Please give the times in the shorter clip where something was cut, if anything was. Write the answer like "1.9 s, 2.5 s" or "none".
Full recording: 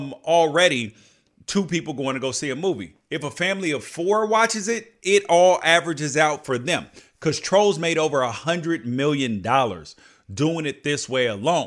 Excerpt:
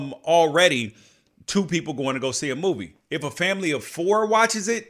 none